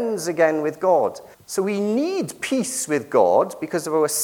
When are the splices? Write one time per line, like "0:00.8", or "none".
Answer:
0:01.3